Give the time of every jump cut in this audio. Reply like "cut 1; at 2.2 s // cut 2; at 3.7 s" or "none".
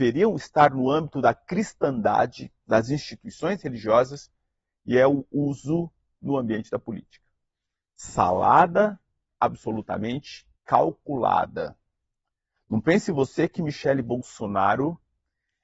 cut 1; at 10.6 s